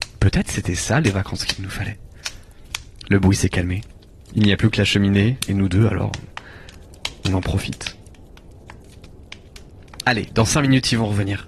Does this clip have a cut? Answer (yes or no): no